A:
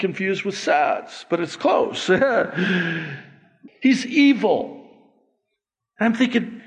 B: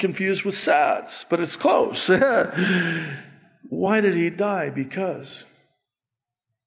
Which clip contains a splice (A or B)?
A